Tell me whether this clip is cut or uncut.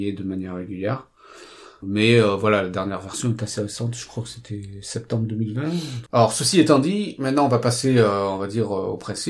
cut